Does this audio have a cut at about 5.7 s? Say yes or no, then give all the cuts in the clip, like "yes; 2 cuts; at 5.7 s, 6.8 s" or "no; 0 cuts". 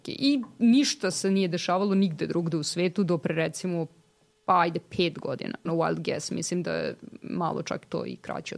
yes; 1 cut; at 5.7 s